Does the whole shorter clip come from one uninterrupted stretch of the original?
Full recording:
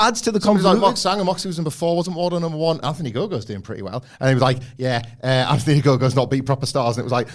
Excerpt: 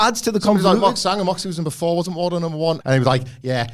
no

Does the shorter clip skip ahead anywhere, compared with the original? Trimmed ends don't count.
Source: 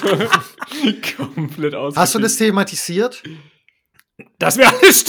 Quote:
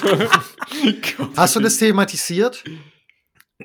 yes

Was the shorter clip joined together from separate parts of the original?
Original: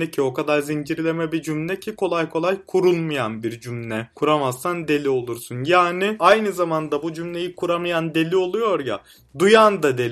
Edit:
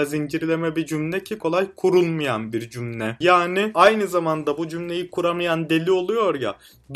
yes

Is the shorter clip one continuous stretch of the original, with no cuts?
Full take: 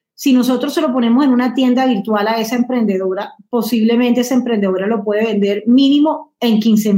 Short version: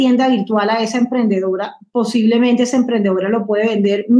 yes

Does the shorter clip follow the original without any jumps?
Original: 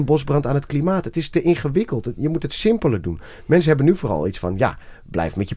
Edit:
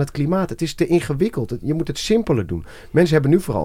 yes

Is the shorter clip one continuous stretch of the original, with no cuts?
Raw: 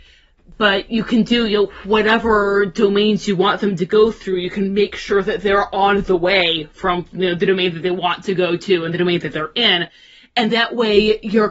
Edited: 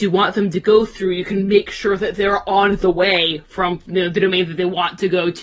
yes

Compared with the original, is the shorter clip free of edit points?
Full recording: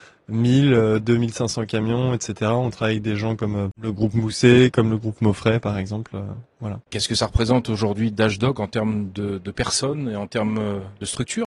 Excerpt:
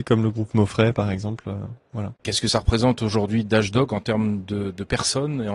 yes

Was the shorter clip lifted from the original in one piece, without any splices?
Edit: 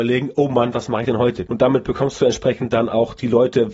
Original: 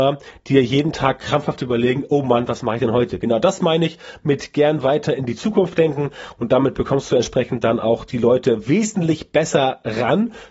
no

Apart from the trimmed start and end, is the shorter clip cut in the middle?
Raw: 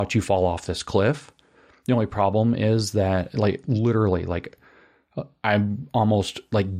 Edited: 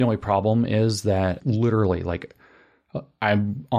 yes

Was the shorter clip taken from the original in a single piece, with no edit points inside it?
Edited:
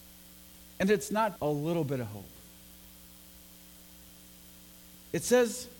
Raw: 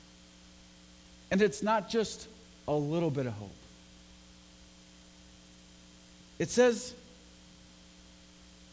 no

